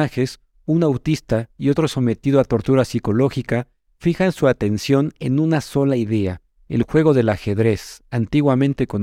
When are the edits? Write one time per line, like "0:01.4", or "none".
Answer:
none